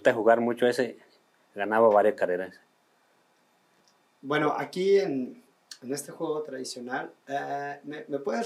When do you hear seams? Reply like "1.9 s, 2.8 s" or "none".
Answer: none